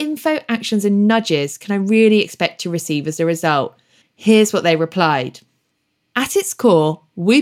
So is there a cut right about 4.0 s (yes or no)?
yes